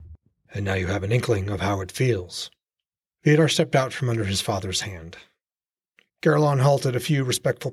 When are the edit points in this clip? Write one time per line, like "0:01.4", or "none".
0:06.1